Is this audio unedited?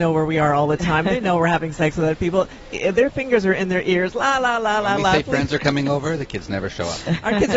yes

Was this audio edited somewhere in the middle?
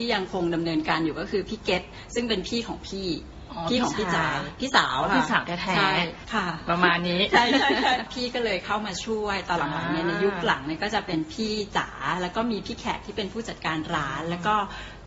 no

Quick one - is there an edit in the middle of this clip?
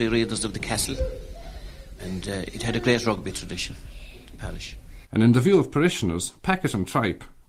yes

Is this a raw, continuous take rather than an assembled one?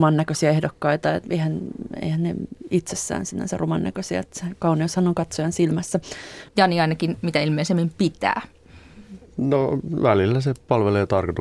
no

